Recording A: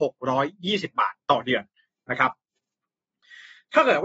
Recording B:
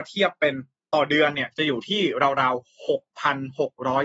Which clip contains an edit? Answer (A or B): A